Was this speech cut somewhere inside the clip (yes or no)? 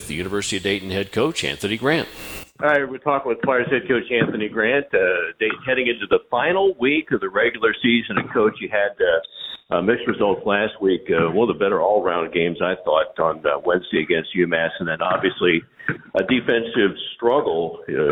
no